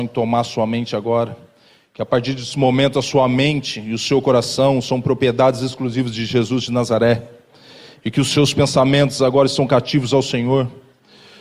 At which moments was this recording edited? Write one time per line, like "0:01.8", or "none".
none